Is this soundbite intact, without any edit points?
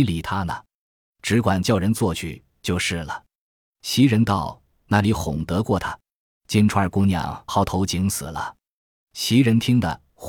no; 2 cuts; at 6.3 s, 7.5 s

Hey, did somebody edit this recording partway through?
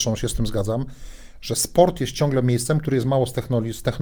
no; 0 cuts

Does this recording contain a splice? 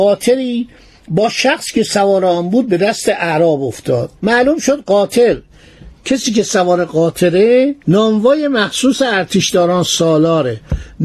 yes; 2 cuts; at 4.2 s, 7.8 s

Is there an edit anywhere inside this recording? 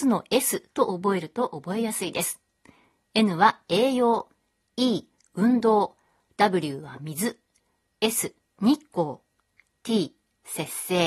no; 0 cuts

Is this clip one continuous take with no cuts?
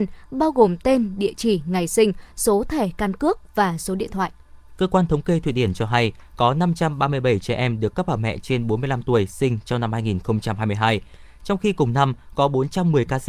yes; 0 cuts

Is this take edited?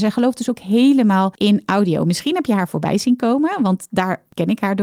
no; 0 cuts

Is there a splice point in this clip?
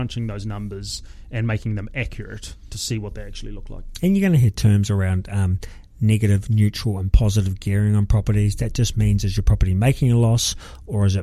no; 0 cuts

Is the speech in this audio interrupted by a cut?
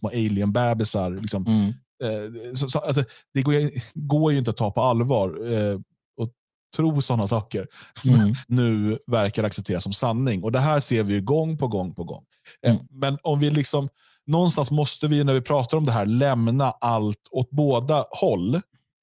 yes; 3 cuts; at 6.1 s, 8.4 s, 12.9 s

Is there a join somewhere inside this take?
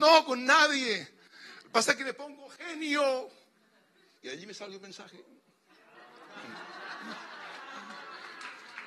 yes; 1 cut; at 4.2 s

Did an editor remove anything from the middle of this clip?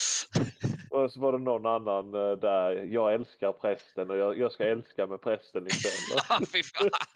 no; 0 cuts

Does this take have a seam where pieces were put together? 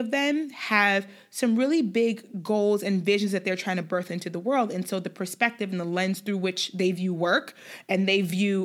no; 0 cuts

